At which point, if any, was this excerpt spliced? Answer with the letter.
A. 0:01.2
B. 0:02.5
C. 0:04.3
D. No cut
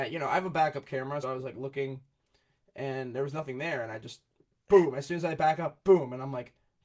A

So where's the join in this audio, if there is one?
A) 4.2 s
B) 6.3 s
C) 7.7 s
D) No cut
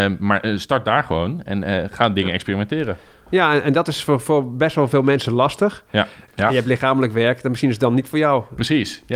B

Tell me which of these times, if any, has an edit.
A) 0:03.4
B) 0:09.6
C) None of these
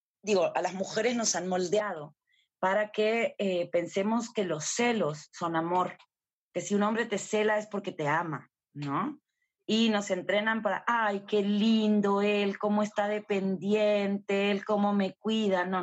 B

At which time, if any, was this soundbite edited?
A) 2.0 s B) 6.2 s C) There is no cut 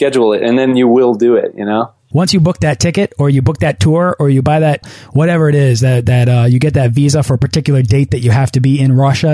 C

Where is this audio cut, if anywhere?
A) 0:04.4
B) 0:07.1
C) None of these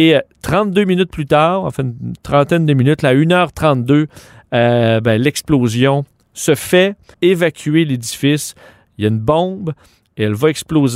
B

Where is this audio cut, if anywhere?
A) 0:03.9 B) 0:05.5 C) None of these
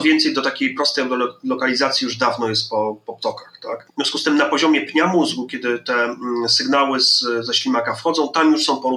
A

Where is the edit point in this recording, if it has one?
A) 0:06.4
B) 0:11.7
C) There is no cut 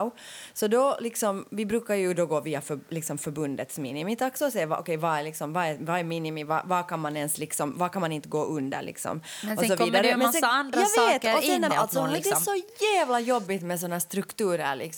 B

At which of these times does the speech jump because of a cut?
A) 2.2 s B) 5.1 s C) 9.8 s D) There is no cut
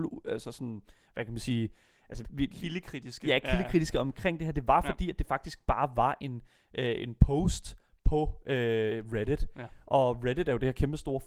A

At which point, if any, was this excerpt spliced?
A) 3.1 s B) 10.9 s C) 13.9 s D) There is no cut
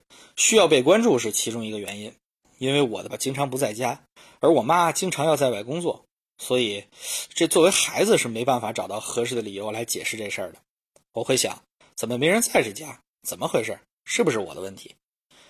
A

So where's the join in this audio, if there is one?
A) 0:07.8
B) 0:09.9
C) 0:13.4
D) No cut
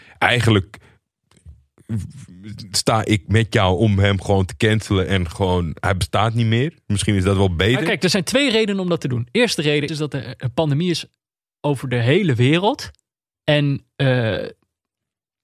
B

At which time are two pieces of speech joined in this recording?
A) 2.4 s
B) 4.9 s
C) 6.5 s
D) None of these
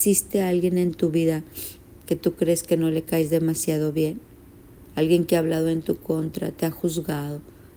D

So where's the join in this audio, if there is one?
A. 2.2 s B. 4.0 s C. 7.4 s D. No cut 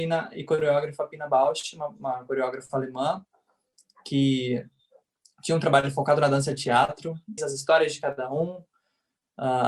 C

